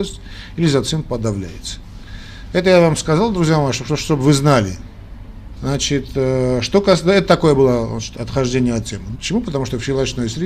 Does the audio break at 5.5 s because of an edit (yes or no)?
yes